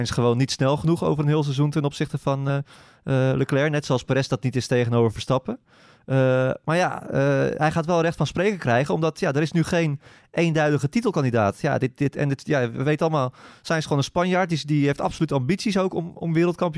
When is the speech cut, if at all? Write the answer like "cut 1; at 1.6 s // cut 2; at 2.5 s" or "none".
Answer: none